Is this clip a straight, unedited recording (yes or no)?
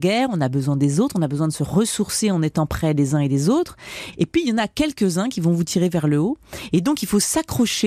no